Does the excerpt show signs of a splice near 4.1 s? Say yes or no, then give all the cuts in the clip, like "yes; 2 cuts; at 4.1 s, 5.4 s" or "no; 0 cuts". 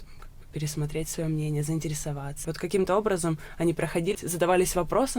yes; 2 cuts; at 2.4 s, 4.1 s